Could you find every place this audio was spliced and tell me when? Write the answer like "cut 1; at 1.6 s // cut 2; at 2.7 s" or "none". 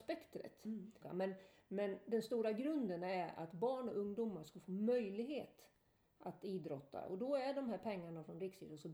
cut 1; at 1.0 s